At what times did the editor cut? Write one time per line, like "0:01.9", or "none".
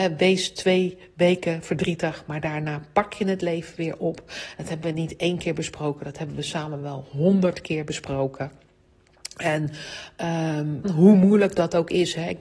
0:10.8

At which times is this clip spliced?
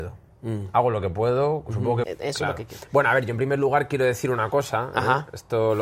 0:02.0

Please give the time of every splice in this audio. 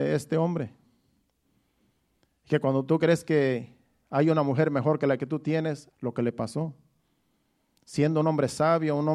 0:05.9

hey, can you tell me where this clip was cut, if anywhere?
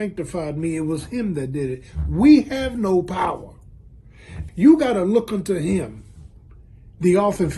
0:04.5

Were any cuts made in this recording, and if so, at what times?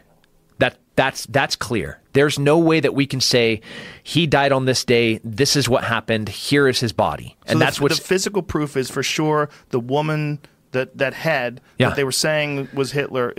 none

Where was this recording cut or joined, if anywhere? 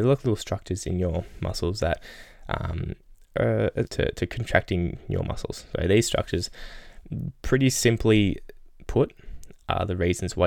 0:03.9

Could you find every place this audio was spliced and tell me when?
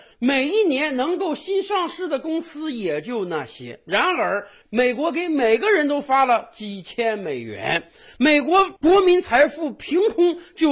0:04.6

